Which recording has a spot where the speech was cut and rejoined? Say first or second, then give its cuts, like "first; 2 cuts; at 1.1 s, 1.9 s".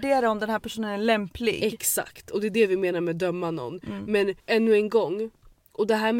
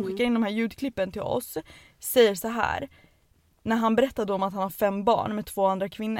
first; 1 cut; at 4.4 s